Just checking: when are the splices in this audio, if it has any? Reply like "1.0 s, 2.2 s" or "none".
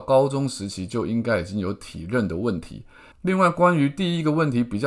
3.1 s